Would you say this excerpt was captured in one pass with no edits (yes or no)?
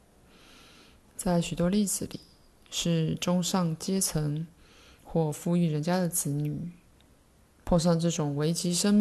yes